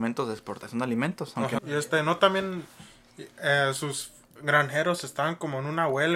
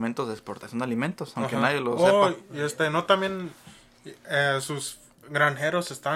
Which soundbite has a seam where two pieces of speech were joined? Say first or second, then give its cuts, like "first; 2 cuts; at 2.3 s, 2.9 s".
first; 1 cut; at 1.6 s